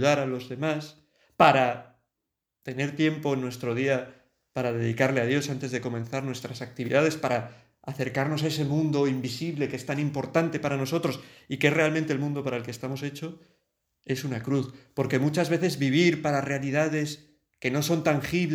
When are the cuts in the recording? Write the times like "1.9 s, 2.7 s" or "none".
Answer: none